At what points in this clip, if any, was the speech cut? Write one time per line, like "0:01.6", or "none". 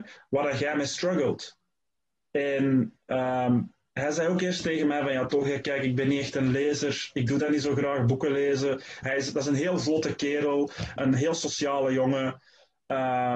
0:09.0
0:11.0